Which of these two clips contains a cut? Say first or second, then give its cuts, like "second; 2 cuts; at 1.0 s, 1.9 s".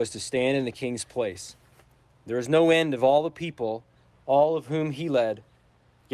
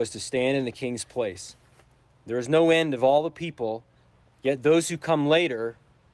second; 1 cut; at 4.2 s